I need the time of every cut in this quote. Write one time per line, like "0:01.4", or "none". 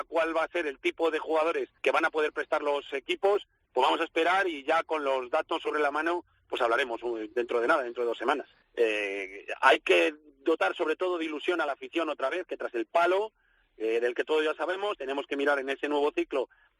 0:01.8
0:08.6
0:14.9